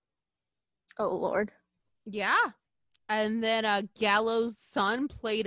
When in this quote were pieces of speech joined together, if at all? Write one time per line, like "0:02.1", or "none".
none